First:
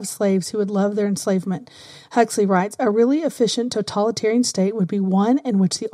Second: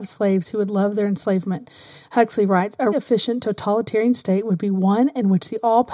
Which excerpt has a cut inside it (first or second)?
second